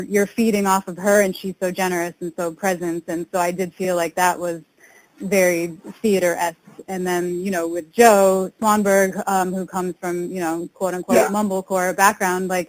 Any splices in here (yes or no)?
no